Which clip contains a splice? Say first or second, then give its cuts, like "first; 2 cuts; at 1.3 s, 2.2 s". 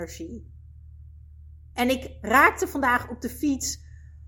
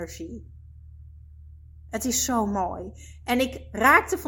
first; 1 cut; at 1.7 s